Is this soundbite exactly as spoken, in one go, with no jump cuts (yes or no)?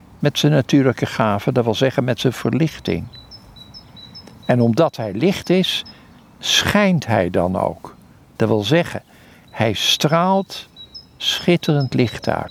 yes